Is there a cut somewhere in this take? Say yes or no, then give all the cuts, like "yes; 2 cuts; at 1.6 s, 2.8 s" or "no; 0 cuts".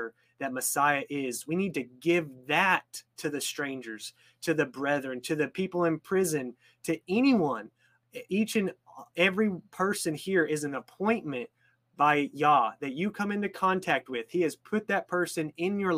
no; 0 cuts